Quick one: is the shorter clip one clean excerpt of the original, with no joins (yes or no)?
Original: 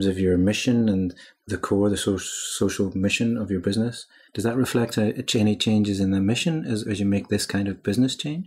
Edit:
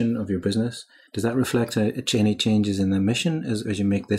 yes